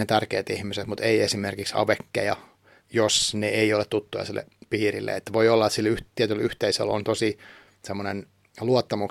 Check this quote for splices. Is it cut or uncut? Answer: cut